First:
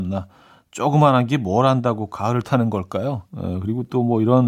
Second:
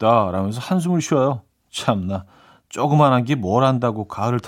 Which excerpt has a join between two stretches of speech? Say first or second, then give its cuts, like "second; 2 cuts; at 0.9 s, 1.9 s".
first; 1 cut; at 3.3 s